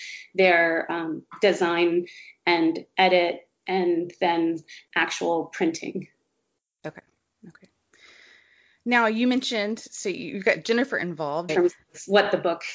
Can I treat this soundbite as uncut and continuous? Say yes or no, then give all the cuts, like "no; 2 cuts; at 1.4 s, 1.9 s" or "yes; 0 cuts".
no; 1 cut; at 11.5 s